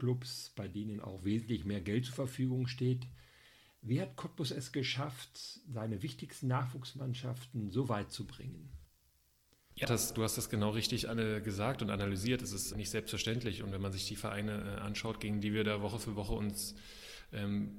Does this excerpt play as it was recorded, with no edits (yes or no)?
no